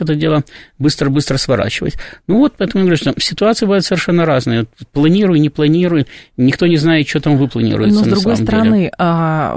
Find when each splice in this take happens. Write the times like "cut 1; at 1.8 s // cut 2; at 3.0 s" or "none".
none